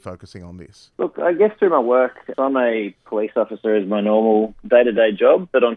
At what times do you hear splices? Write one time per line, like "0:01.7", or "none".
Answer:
0:00.9
0:02.3